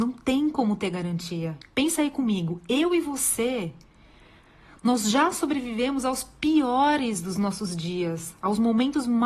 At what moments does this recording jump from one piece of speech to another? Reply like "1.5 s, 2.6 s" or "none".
1.6 s